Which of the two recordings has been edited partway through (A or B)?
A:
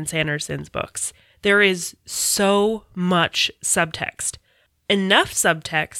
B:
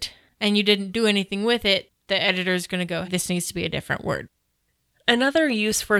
B